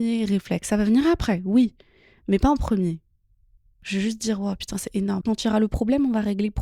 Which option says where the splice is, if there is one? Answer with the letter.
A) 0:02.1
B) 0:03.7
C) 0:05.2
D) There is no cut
C